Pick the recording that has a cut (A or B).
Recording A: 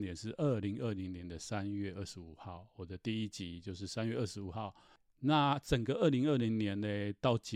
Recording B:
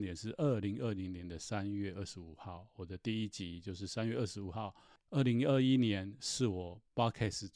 B